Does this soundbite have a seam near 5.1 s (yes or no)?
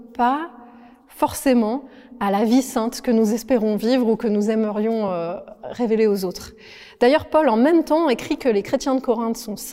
no